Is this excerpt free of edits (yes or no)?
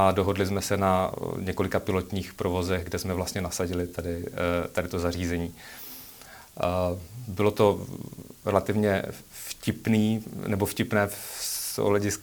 yes